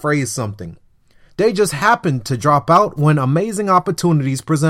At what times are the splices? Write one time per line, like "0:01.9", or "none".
0:01.3